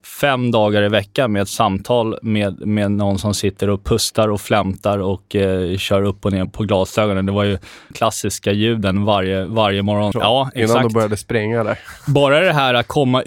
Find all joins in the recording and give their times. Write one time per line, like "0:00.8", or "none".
0:06.5
0:07.9
0:10.1